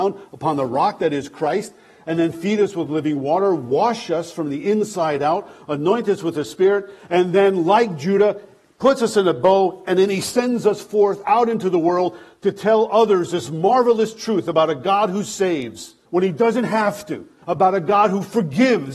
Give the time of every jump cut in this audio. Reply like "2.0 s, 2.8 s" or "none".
16.1 s, 17.4 s